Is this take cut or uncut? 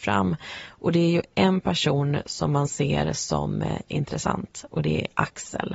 uncut